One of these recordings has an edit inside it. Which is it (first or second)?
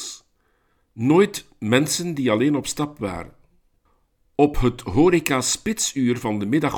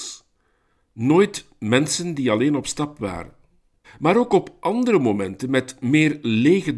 second